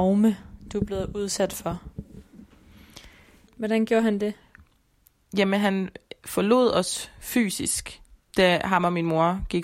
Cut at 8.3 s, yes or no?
yes